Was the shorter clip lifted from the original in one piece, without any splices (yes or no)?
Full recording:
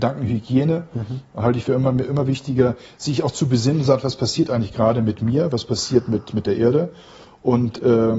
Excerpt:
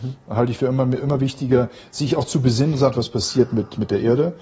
no